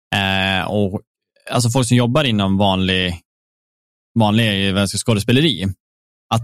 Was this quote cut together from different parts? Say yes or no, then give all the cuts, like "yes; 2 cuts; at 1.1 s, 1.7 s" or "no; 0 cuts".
no; 0 cuts